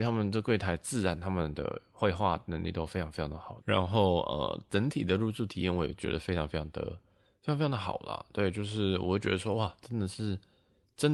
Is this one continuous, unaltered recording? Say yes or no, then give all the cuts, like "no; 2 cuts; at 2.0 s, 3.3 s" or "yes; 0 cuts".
no; 1 cut; at 3.6 s